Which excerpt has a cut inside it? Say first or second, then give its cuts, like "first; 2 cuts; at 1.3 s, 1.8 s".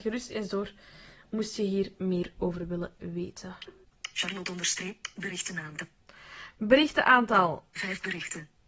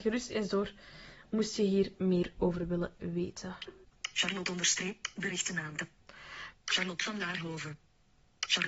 second; 1 cut; at 6.5 s